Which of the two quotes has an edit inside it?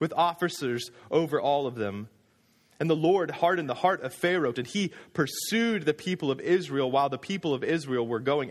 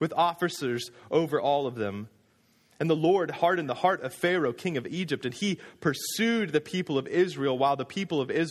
first; 1 cut; at 4.5 s

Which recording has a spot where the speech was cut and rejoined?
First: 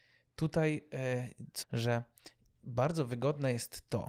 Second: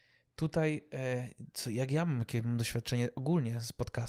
first; 1 cut; at 1.6 s

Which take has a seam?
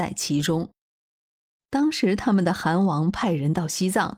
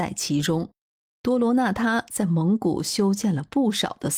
second; 1 cut; at 1.2 s

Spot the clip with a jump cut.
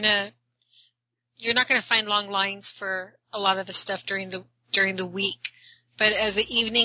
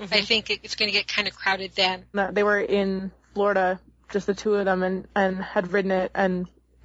second; 1 cut; at 2.1 s

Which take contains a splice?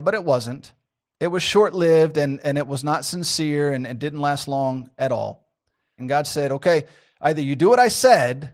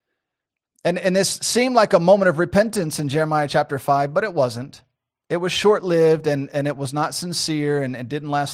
first; 1 cut; at 6.0 s

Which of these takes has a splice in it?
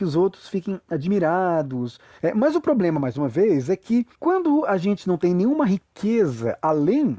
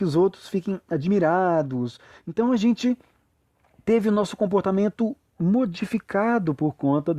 first; 2 cuts; at 2.2 s, 4.1 s

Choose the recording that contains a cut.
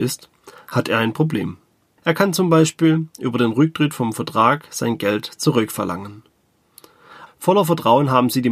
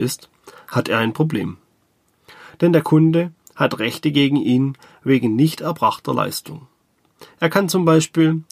first; 2 cuts; at 2.0 s, 7.3 s

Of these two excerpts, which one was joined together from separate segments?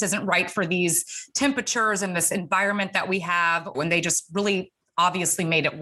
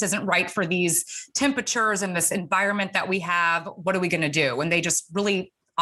first; 1 cut; at 3.7 s

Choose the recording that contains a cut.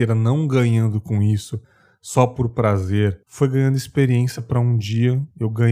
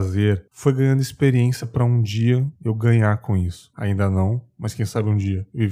second; 1 cut; at 3.7 s

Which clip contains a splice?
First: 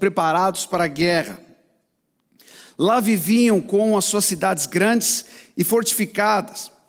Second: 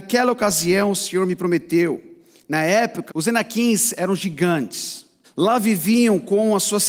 second; 2 cuts; at 3.1 s, 5.2 s

